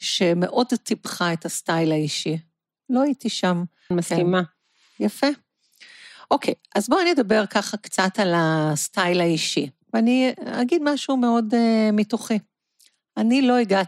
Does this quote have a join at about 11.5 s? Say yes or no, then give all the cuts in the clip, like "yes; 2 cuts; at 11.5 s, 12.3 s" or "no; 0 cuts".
no; 1 cut; at 3.9 s